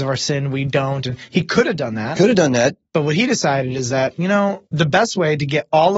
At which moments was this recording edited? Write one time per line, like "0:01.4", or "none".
0:04.7